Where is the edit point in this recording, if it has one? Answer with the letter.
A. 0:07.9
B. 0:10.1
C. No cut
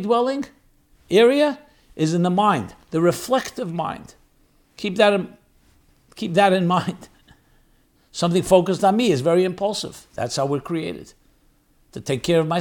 A